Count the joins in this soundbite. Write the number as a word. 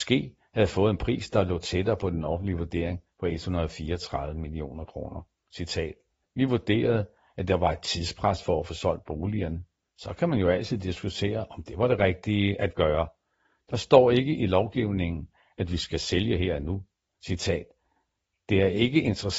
two